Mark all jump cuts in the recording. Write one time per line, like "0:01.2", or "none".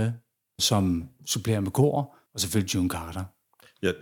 0:02.3